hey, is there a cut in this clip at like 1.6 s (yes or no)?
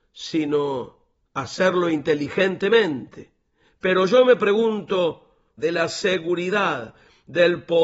no